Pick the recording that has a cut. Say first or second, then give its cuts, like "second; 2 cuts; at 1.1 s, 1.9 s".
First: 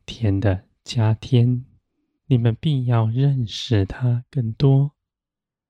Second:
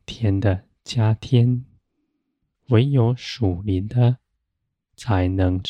first; 1 cut; at 2.2 s